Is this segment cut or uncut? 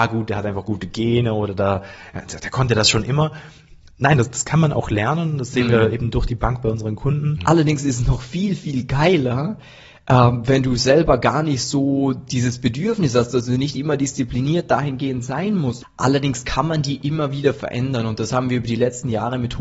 cut